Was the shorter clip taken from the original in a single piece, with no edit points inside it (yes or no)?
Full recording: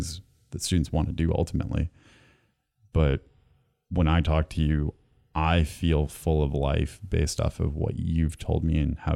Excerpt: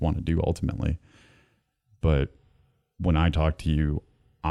yes